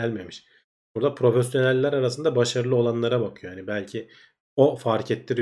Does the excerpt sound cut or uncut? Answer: uncut